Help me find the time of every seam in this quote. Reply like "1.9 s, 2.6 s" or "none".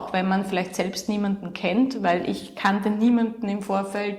none